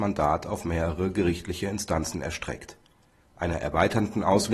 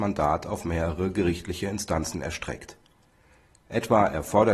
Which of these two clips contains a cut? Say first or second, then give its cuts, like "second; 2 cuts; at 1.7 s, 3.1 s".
first; 1 cut; at 3.2 s